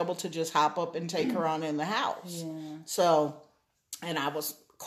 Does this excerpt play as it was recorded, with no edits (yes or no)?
yes